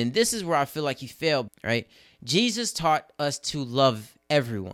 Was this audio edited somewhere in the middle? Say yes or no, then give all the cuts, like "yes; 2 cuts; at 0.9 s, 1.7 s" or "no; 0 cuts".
yes; 1 cut; at 1.5 s